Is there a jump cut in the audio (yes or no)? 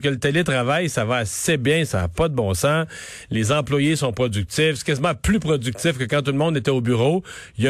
no